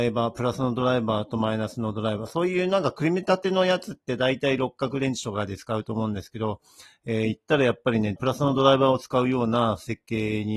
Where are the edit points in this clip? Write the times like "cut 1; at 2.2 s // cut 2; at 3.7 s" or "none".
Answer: cut 1; at 8.2 s